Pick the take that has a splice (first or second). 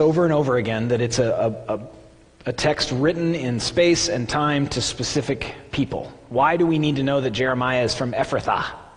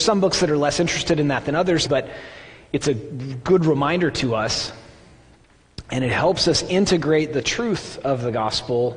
second